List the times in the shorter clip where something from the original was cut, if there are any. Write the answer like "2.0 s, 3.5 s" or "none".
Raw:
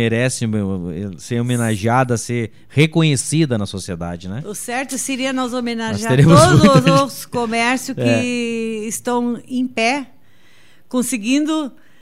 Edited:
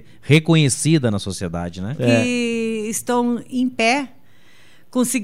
2.0 s